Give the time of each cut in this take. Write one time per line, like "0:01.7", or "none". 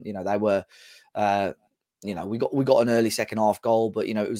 none